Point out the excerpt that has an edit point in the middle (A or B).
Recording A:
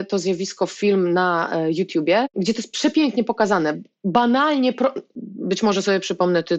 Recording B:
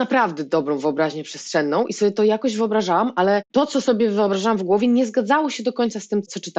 A